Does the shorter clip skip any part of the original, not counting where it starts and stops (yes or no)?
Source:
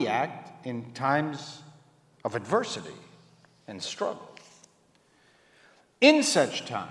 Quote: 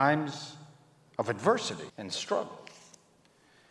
yes